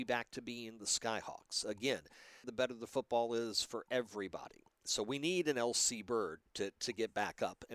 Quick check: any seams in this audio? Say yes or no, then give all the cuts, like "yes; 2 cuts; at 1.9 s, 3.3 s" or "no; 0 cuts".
yes; 1 cut; at 2.4 s